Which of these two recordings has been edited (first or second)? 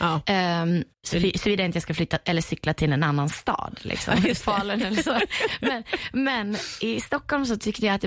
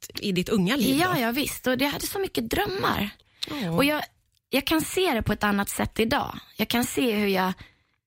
first